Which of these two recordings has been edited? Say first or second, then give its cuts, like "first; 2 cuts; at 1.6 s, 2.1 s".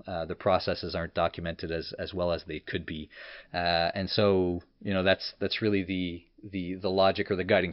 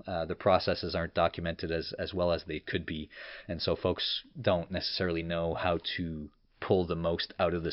first; 1 cut; at 3.5 s